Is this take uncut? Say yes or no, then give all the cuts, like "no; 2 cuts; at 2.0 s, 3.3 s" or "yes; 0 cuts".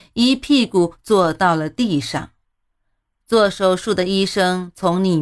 yes; 0 cuts